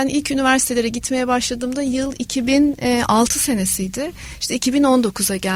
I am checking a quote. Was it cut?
no; 0 cuts

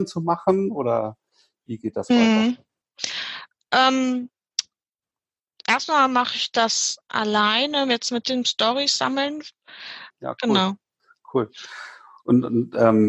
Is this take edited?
yes; 1 cut; at 10.1 s

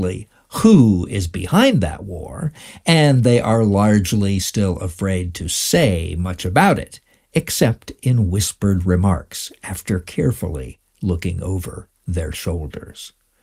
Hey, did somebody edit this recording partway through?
no; 0 cuts

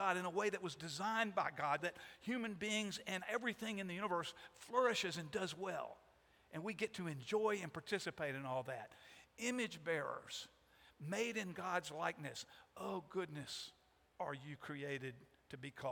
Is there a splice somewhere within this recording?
yes; 1 cut; at 1.8 s

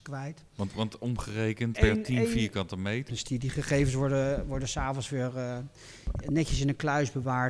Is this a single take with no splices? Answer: no; 2 cuts; at 1.7 s, 3.1 s

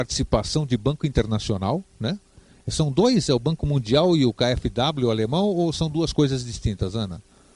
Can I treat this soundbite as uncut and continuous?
yes; 0 cuts

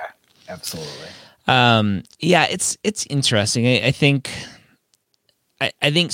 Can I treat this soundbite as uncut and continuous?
yes; 0 cuts

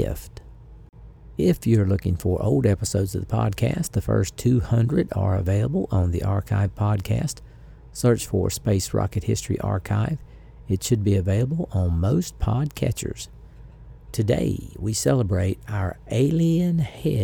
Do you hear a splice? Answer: no; 0 cuts

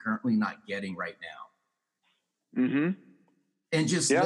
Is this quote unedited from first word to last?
yes; 0 cuts

